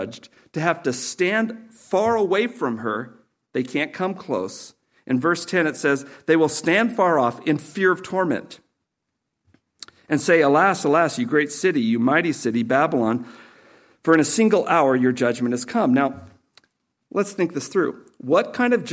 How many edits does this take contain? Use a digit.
0